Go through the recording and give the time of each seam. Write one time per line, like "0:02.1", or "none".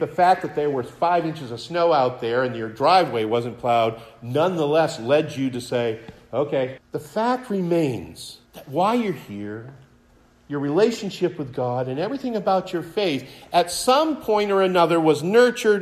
0:06.8
0:08.5